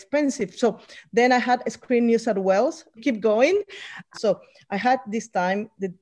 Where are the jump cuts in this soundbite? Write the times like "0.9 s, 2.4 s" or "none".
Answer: 3.0 s, 4.1 s